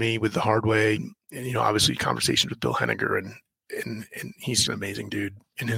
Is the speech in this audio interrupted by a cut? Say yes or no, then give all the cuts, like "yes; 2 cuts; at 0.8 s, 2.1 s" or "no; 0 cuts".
yes; 2 cuts; at 1.0 s, 4.7 s